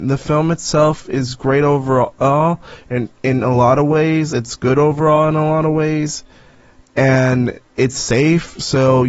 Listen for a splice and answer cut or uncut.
uncut